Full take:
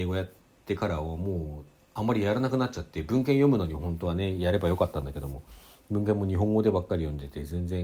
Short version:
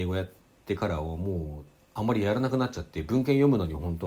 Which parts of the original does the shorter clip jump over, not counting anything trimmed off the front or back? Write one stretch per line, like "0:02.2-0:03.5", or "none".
none

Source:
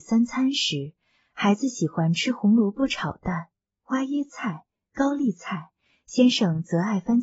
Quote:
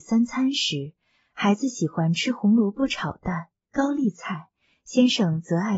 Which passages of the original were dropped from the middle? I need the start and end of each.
0:03.6-0:04.8

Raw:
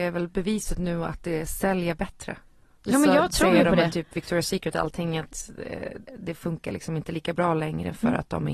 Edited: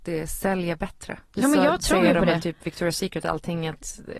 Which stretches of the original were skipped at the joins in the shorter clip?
0:02.4-0:02.7

